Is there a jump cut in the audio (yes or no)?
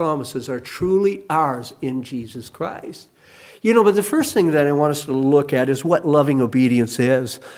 no